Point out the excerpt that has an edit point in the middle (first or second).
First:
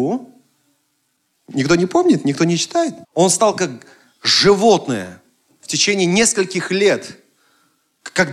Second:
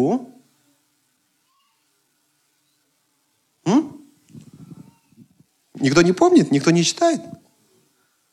first